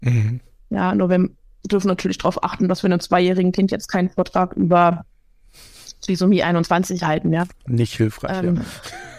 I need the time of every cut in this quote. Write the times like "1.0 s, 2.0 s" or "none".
none